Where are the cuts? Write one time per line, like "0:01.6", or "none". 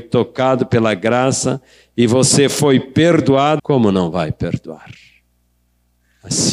0:03.6